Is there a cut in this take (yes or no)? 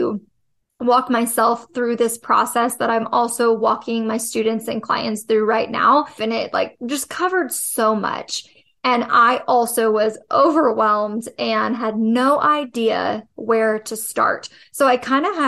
yes